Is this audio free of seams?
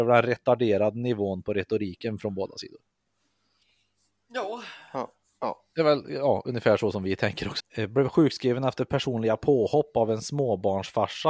no; 1 cut; at 7.6 s

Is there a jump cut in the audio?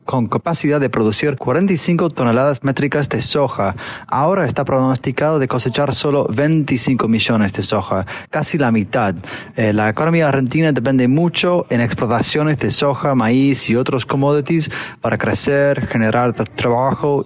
no; 0 cuts

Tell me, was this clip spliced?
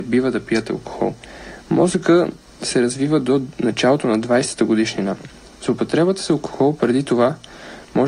no; 0 cuts

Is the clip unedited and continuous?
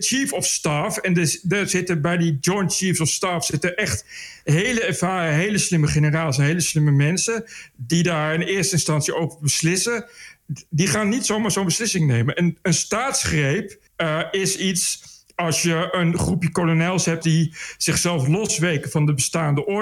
no; 2 cuts; at 13.9 s, 17.2 s

